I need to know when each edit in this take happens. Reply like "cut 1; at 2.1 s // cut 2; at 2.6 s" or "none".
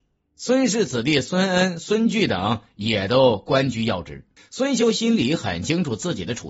cut 1; at 4.4 s